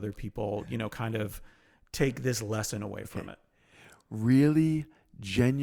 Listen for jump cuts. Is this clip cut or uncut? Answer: uncut